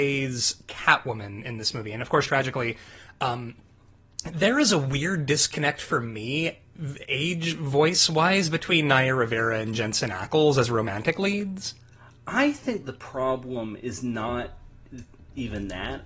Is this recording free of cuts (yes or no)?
no